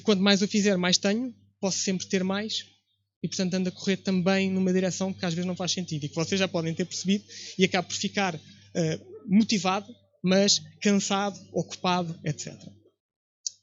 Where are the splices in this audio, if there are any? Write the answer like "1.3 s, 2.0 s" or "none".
none